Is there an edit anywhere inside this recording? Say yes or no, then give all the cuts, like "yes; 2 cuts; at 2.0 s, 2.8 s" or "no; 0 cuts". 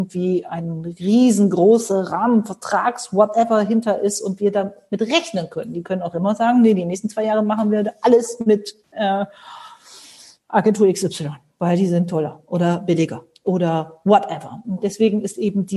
yes; 1 cut; at 14.6 s